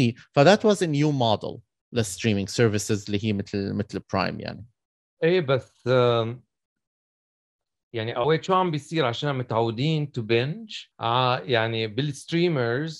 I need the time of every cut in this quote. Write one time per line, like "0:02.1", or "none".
0:10.9